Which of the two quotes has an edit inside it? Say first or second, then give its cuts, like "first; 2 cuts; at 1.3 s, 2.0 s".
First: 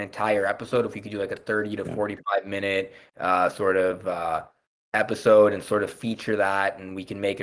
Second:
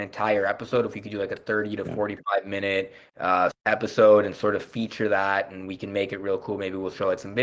second; 1 cut; at 3.5 s